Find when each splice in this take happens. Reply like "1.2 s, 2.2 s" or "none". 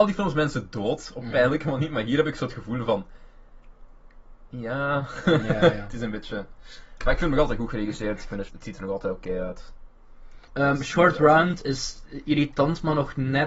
8.5 s, 10.5 s